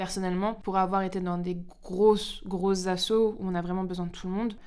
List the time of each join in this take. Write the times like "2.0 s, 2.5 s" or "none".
none